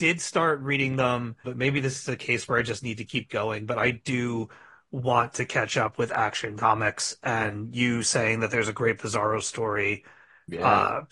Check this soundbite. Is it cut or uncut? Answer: cut